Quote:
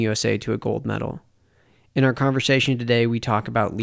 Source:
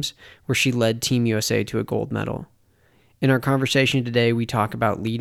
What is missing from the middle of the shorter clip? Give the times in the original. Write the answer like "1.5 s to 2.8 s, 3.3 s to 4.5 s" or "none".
none

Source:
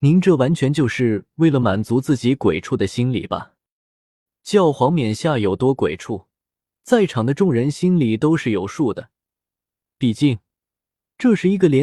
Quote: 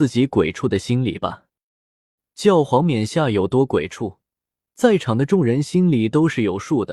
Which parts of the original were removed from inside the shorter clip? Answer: none

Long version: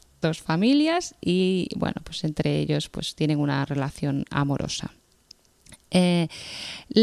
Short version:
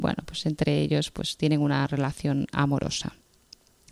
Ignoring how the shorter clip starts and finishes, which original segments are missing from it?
none

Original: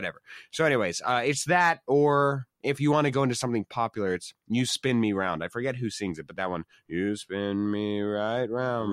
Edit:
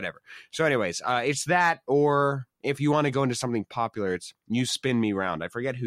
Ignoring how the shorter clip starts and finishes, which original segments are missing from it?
none

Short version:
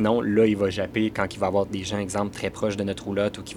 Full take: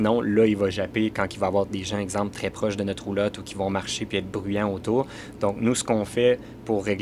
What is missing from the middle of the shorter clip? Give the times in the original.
none

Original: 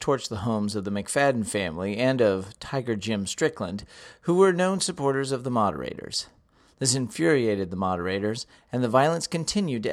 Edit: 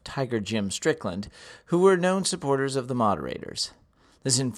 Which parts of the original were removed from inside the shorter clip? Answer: none

